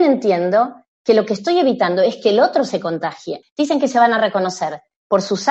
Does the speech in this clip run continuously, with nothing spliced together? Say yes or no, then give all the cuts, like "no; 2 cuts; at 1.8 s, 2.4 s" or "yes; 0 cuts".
no; 1 cut; at 3.4 s